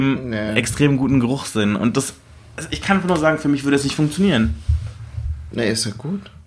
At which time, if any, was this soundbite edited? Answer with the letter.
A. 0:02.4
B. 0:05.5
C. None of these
C